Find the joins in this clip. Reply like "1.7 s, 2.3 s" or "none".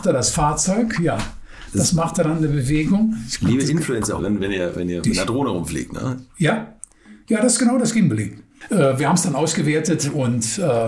4.2 s